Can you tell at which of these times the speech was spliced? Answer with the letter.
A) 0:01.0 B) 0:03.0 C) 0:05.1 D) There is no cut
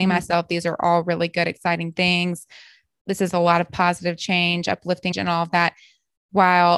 C